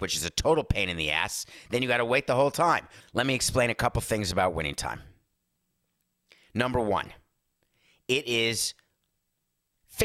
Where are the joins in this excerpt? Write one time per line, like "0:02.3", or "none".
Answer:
0:03.0